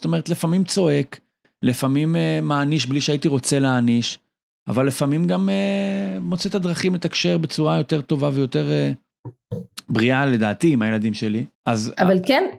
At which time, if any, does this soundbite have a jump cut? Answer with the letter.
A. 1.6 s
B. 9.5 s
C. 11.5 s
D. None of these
C